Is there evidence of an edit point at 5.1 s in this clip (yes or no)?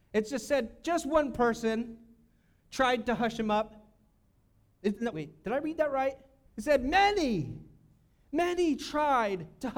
yes